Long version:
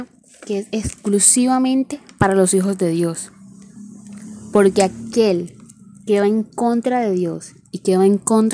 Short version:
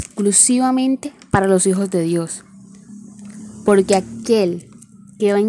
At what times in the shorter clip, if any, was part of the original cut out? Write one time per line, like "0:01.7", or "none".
none

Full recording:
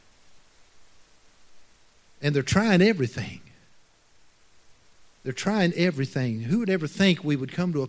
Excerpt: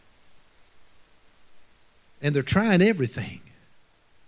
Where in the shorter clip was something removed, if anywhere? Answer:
none

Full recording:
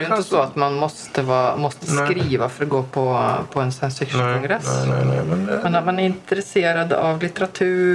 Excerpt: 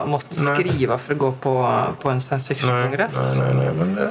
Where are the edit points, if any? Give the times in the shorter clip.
none

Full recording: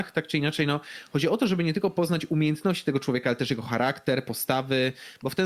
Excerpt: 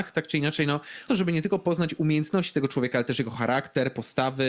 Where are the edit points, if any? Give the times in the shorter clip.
0:01.1

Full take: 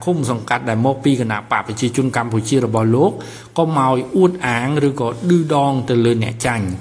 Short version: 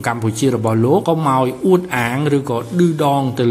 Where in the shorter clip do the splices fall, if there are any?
0:01.0

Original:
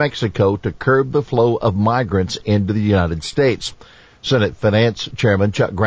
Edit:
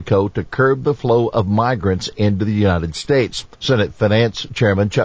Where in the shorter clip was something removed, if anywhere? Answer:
0:03.5

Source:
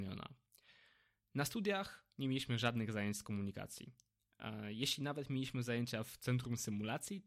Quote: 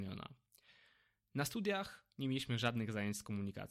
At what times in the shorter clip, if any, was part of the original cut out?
none

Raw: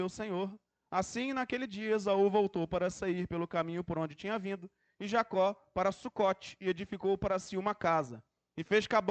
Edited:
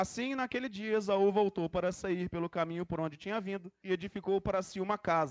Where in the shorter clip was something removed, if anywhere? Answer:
0:03.8

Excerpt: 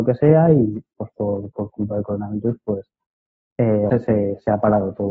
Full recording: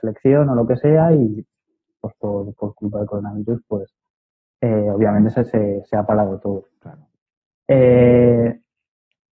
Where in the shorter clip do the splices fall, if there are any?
0:00.9
0:03.9

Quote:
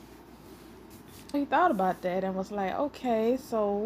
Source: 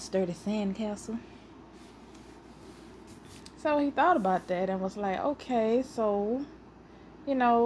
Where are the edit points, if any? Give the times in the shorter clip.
0:01.3

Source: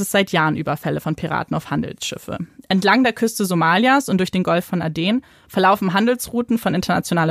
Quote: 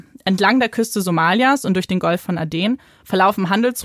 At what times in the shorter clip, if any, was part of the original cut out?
none

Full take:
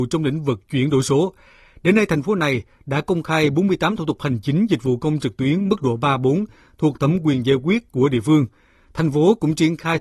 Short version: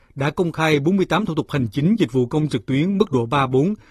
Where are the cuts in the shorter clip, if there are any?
none

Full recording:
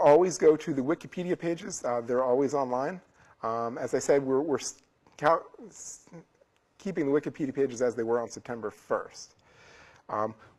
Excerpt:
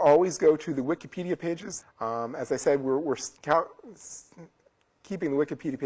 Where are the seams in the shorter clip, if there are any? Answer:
0:01.8
0:03.4

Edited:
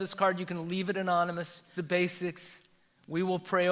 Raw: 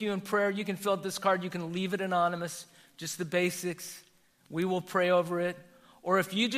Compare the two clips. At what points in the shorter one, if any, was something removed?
0:01.7

